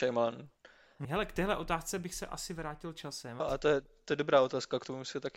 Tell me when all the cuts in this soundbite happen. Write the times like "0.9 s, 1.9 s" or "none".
1.0 s, 3.4 s